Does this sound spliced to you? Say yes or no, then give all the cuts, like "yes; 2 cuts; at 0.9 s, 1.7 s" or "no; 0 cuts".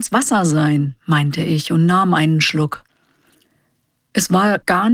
no; 0 cuts